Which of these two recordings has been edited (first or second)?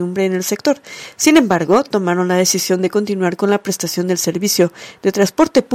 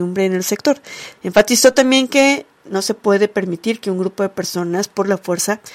second